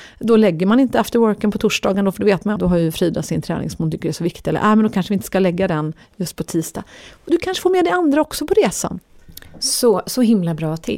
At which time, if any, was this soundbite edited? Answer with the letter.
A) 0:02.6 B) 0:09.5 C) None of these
A